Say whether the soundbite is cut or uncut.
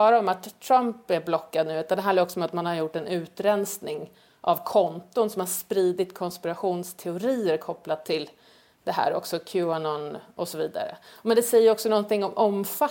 uncut